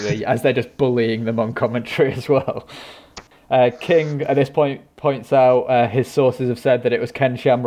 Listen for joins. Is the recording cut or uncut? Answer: uncut